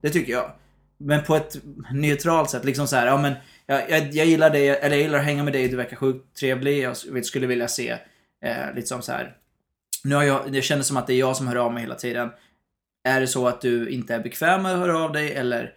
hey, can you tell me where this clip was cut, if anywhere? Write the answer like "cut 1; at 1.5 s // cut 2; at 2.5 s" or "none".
none